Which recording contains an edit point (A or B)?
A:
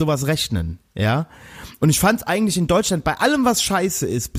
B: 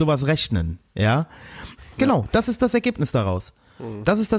B